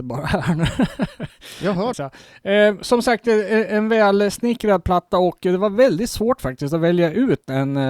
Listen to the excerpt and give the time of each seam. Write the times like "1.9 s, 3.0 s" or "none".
1.9 s